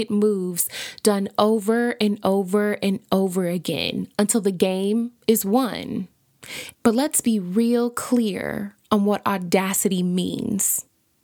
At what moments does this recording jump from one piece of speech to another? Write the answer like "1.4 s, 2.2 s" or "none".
6.7 s